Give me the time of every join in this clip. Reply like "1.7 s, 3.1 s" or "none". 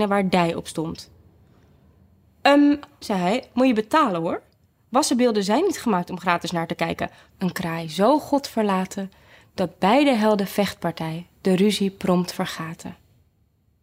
3.0 s, 7.3 s